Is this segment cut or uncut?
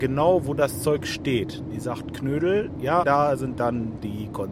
cut